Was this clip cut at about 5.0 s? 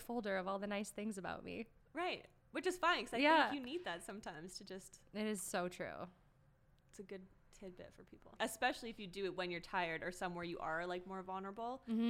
no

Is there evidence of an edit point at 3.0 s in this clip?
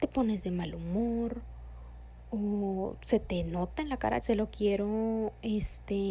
no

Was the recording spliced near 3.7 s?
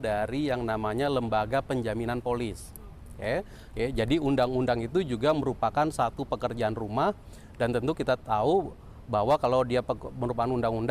yes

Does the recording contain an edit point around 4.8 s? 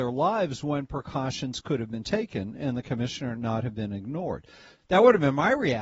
yes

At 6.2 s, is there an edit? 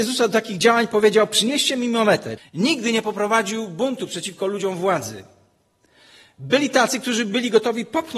no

